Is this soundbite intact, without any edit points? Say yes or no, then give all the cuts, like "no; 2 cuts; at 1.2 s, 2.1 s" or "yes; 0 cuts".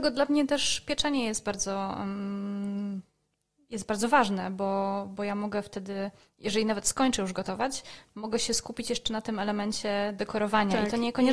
yes; 0 cuts